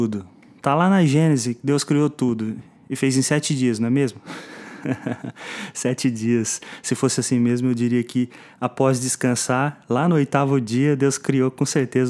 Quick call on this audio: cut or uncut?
uncut